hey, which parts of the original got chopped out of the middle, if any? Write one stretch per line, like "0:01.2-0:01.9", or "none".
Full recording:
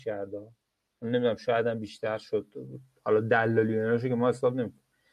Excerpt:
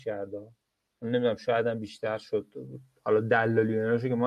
none